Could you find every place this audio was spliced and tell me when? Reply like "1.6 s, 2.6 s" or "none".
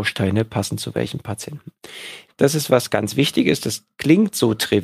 2.3 s